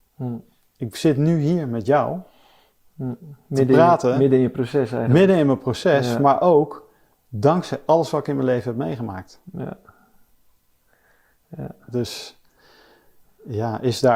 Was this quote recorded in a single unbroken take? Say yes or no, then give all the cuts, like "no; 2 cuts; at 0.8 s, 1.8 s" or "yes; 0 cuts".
yes; 0 cuts